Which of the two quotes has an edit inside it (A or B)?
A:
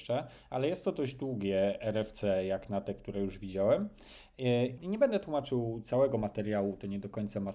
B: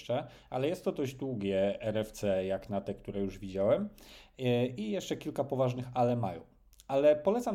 A